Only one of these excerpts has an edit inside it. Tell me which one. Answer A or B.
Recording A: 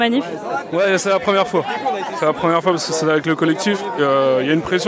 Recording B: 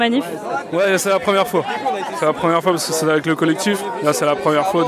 A